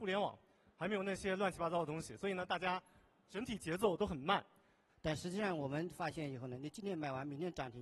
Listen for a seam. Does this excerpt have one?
yes; 1 cut; at 4.9 s

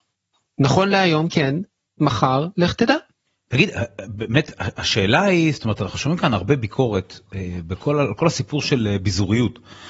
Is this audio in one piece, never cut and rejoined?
yes; 0 cuts

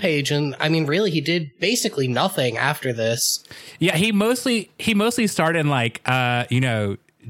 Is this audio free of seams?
yes; 0 cuts

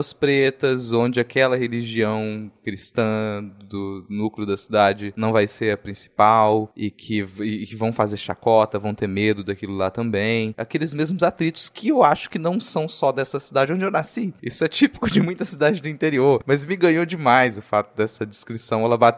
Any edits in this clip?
no; 0 cuts

